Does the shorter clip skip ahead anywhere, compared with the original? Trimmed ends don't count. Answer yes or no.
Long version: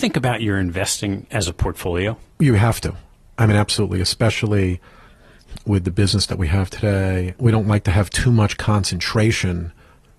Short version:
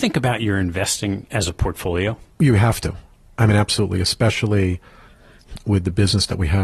no